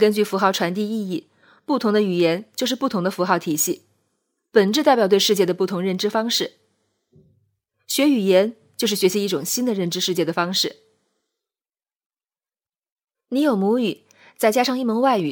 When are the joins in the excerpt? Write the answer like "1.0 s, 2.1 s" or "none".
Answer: none